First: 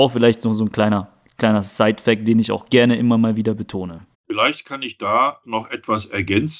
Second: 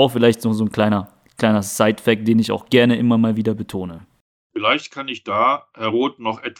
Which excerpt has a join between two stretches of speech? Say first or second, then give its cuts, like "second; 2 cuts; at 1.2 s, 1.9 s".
first; 2 cuts; at 4.1 s, 5.4 s